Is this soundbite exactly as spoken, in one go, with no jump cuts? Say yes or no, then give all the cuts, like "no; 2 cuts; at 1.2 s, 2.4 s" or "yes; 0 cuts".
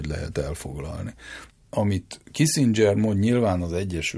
yes; 0 cuts